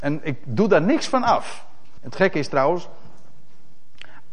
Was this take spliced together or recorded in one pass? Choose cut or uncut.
cut